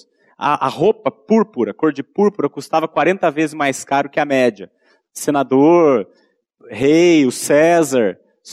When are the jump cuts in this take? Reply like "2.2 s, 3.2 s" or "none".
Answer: 5.0 s